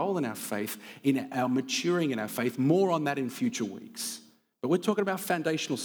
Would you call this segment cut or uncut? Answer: uncut